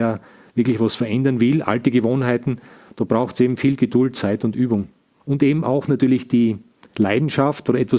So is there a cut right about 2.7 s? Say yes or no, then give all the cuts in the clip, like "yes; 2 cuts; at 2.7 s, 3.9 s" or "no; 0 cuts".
no; 0 cuts